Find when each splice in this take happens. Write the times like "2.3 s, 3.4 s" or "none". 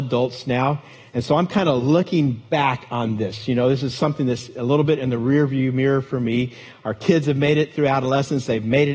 none

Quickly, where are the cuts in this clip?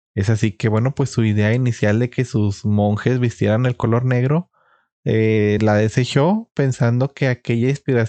none

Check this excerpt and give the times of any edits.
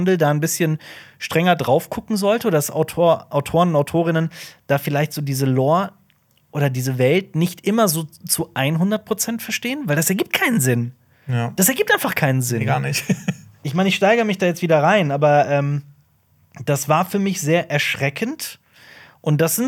none

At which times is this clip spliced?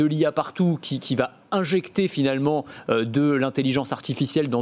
none

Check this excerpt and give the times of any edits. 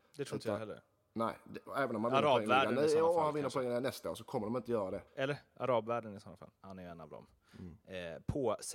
5.1 s, 6.6 s

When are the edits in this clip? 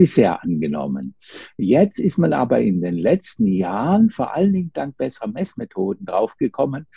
none

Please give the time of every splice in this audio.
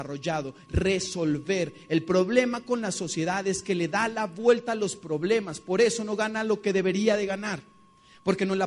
none

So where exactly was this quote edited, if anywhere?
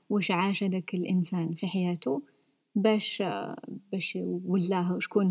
none

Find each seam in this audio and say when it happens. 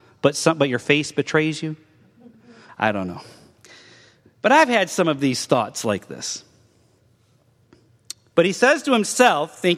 2.7 s, 8.3 s

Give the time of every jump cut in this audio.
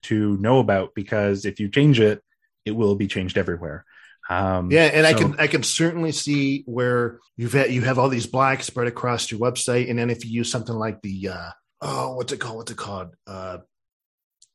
7.3 s, 11.7 s

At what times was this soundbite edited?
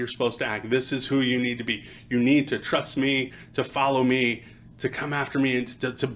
none

